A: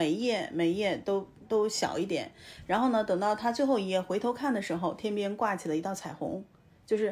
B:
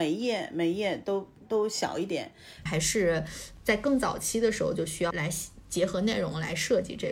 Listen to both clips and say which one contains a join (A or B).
B